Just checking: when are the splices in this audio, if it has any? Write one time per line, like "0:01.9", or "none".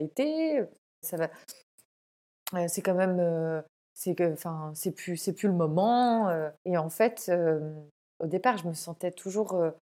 0:01.0
0:06.6